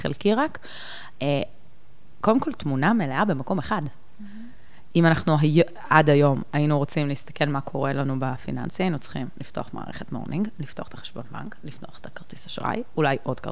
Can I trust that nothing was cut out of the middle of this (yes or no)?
yes